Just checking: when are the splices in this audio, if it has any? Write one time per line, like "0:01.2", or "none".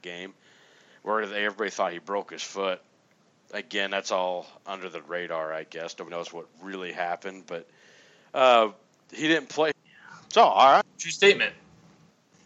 0:06.1
0:09.7
0:10.8